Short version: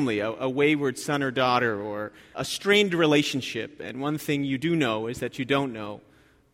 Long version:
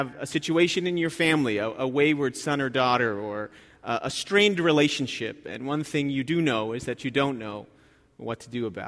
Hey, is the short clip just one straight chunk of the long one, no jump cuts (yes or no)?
no